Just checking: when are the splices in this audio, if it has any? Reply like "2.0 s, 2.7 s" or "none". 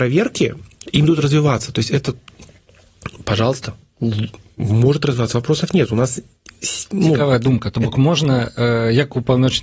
none